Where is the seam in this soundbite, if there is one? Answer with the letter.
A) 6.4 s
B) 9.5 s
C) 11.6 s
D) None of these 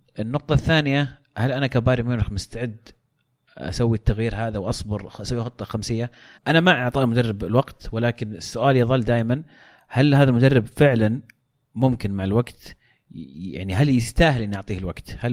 A